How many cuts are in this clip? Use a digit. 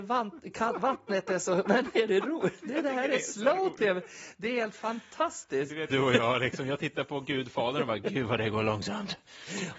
1